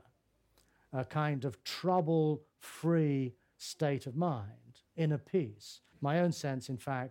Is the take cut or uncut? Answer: cut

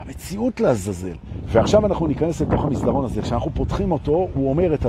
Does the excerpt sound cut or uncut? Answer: cut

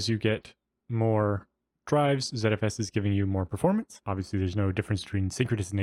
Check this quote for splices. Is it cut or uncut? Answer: cut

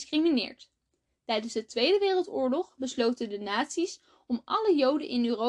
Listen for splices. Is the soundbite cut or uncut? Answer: uncut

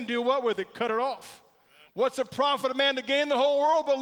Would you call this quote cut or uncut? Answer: cut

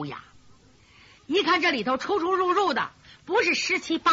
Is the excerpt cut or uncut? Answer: uncut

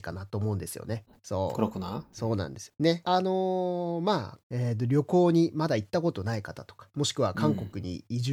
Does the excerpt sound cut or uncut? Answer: cut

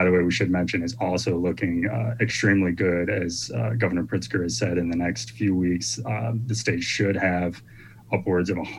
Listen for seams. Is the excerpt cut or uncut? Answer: uncut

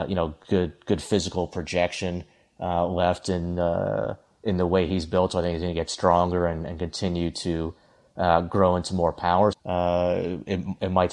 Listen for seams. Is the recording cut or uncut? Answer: cut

